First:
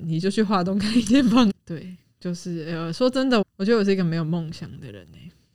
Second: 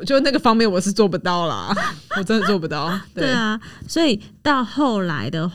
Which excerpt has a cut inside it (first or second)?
first